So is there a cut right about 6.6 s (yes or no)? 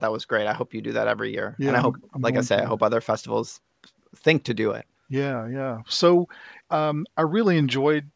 yes